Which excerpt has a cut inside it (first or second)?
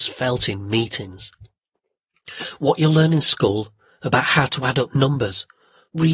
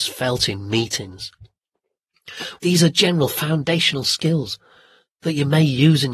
second